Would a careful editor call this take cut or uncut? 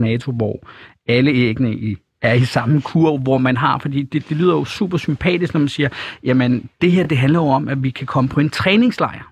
uncut